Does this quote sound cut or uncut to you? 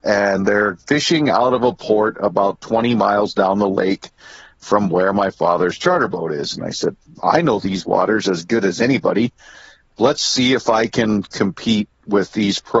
uncut